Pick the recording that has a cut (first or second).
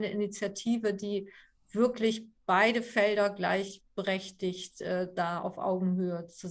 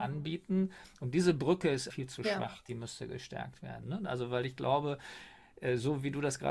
second